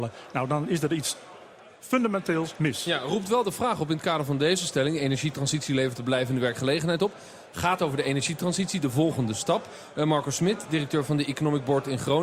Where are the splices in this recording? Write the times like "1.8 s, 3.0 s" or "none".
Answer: none

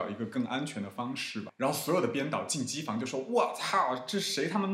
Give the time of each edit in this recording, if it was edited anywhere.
1.5 s

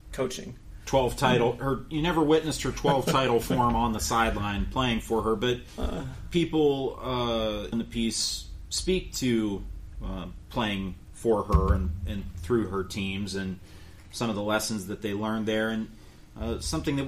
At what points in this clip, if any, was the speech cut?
7.7 s

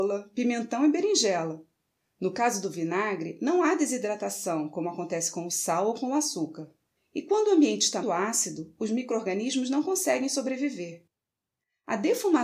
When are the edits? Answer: 7.0 s, 8.0 s

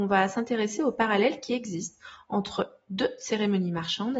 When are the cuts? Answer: none

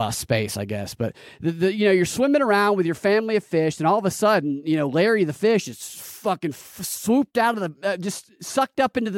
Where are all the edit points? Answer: none

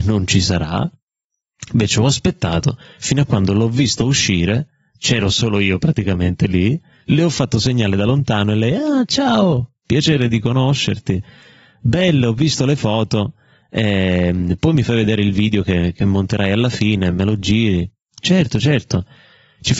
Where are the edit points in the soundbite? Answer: none

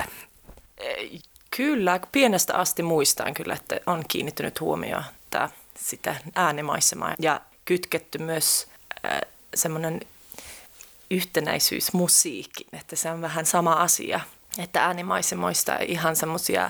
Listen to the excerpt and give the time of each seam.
7.1 s

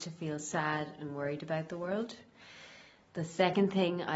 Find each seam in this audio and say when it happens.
none

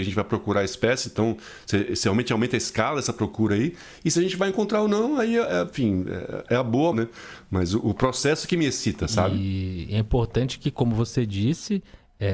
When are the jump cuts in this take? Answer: 6.9 s

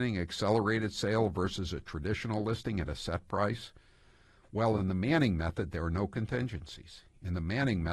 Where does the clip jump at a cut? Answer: none

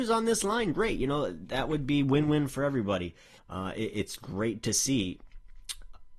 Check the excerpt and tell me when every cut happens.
3.4 s

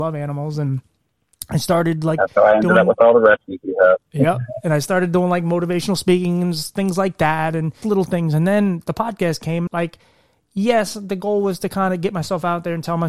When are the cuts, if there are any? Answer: 7.8 s, 9.7 s

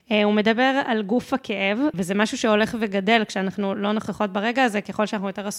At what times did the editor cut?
1.9 s

